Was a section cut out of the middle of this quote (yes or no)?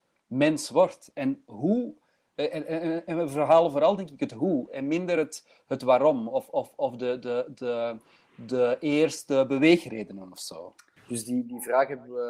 no